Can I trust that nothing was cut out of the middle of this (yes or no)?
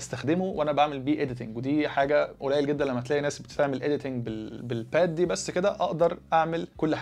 no